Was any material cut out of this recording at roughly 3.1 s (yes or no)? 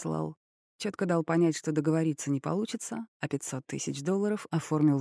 no